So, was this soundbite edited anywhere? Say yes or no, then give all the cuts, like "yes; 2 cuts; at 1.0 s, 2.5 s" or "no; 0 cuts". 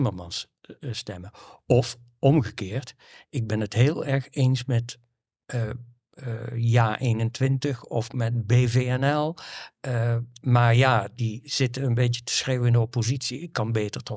no; 0 cuts